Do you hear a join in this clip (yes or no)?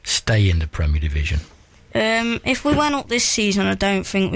no